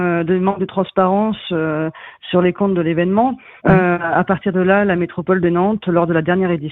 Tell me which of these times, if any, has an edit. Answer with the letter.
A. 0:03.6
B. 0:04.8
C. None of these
A